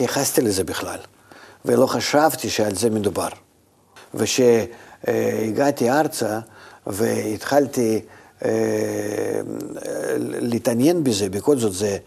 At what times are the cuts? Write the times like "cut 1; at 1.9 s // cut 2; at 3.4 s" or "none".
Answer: cut 1; at 4.0 s